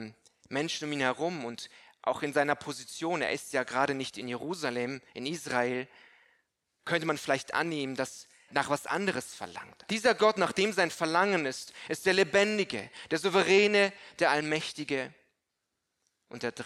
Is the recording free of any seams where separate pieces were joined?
no; 2 cuts; at 8.5 s, 9.9 s

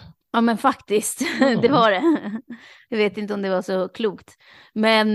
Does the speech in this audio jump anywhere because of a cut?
no; 0 cuts

